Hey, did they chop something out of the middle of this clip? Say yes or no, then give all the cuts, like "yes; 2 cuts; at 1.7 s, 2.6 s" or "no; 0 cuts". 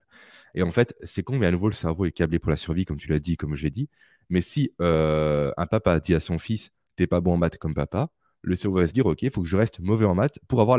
no; 0 cuts